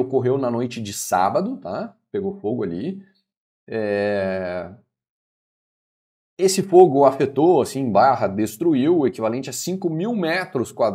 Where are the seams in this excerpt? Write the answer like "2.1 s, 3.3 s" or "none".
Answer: none